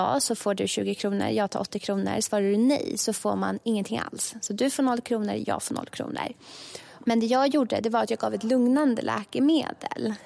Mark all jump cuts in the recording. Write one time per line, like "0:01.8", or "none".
0:07.0